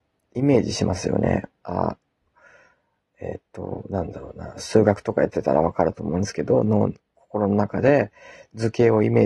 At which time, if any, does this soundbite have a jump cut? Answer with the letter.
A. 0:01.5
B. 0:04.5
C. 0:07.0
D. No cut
D